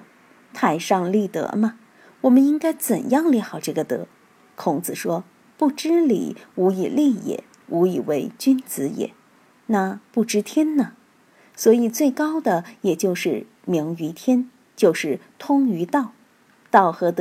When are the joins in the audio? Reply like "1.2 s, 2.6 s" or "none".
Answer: 7.6 s